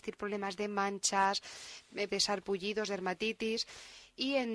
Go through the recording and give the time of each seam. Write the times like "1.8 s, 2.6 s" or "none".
2.1 s